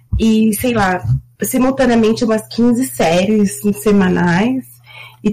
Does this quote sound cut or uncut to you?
uncut